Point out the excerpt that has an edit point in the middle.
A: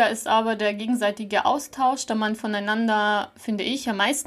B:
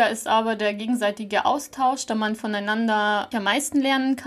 B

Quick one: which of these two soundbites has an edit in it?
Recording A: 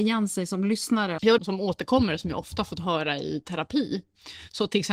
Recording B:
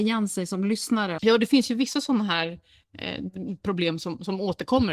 A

